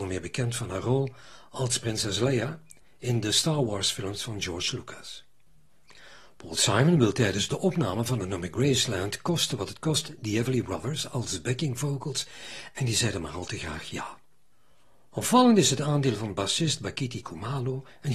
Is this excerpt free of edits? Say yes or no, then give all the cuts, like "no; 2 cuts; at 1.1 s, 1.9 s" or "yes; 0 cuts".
yes; 0 cuts